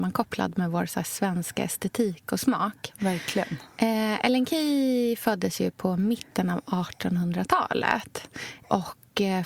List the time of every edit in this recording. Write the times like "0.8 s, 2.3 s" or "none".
none